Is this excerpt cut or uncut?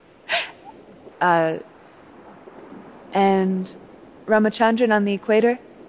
cut